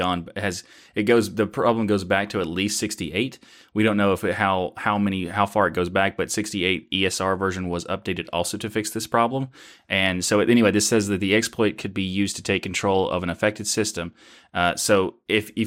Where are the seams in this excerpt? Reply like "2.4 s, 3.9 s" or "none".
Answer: none